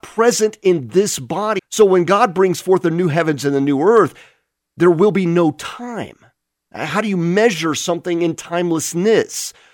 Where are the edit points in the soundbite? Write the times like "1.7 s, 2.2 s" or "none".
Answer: 1.6 s